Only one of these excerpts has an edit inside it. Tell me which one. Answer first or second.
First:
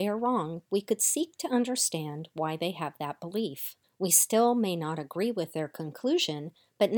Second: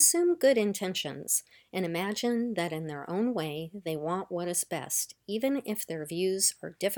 first